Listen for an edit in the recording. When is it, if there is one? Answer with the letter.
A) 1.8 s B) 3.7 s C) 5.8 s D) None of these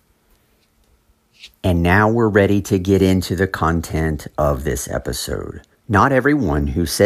C